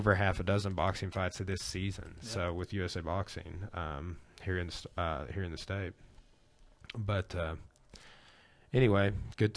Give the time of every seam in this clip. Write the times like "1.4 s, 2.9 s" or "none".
none